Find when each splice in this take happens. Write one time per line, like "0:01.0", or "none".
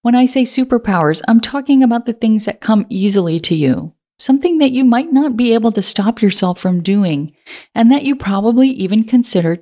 none